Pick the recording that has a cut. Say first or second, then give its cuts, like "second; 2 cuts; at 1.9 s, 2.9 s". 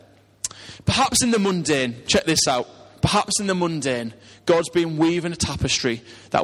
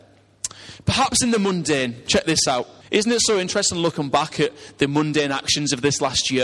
second; 1 cut; at 2.8 s